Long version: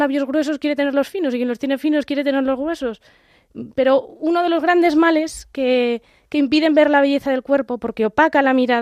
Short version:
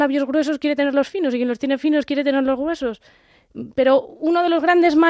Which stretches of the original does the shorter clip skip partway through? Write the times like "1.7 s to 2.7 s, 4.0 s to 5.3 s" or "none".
none